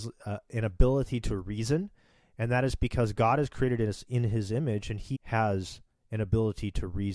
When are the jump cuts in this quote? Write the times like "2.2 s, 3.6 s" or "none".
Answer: 5.1 s